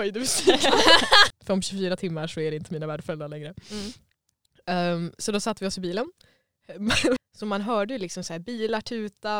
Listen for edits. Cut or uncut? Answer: cut